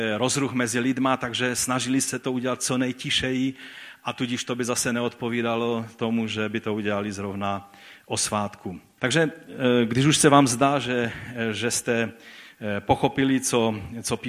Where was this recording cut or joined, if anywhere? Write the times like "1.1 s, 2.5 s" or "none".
9.0 s